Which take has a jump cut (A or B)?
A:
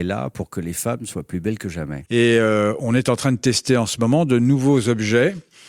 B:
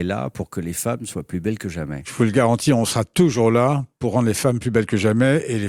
A